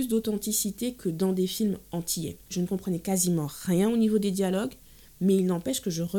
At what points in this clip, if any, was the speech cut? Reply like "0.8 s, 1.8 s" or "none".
2.5 s